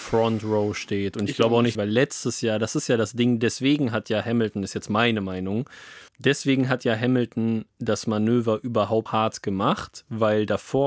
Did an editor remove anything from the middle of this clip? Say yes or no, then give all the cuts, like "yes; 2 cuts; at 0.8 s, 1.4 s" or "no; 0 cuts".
yes; 3 cuts; at 1.7 s, 6.1 s, 9.1 s